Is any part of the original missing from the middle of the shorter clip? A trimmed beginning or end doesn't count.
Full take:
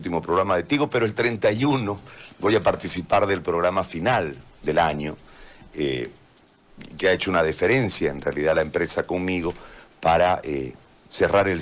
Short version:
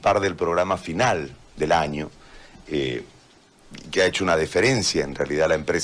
no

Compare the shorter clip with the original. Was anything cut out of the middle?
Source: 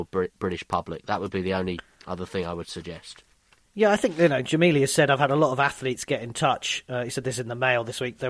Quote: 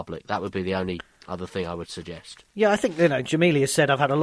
yes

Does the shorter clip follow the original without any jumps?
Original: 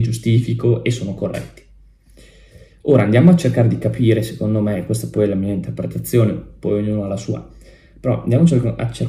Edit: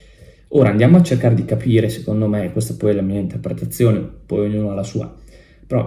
yes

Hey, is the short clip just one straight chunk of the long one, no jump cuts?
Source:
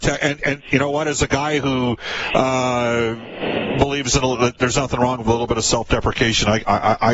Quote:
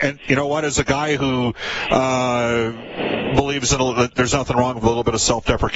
yes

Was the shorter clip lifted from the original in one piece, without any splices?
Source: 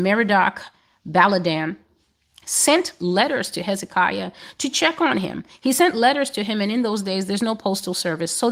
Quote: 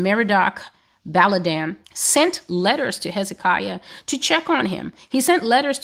no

